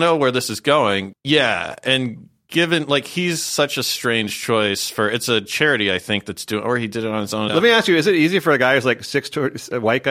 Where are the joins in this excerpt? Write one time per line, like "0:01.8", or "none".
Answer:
0:01.1
0:07.5